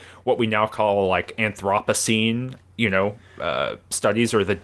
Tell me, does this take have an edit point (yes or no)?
yes